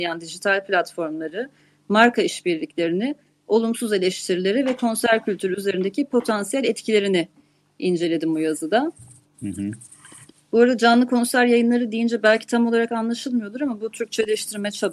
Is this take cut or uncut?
uncut